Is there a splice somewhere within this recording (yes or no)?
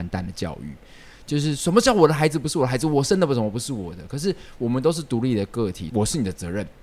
yes